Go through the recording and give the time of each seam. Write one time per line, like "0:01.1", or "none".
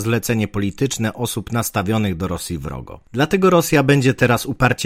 0:03.1